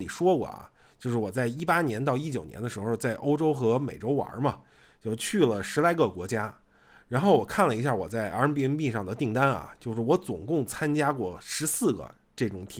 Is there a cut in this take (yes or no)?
no